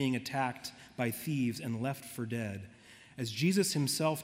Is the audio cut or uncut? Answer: uncut